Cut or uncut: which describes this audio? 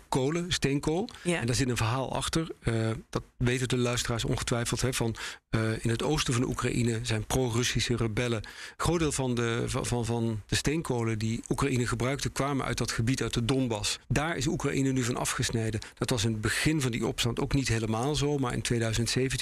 uncut